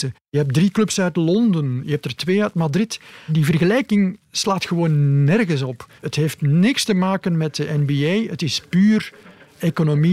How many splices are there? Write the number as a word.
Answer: one